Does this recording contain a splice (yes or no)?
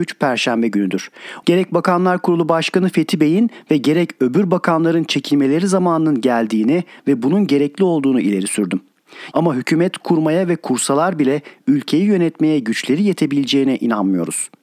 yes